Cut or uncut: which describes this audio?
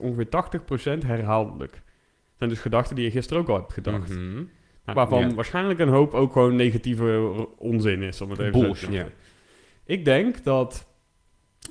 cut